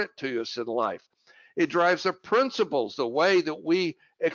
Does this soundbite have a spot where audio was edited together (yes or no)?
no